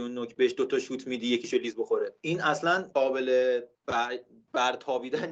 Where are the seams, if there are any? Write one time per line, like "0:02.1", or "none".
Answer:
0:03.7